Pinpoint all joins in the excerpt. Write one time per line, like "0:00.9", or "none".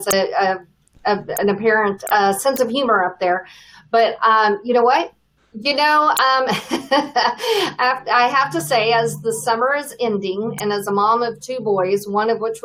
0:05.4